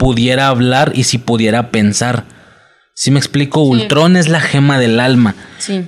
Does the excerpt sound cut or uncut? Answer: uncut